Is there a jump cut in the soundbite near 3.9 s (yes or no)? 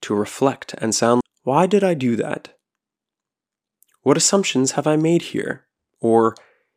no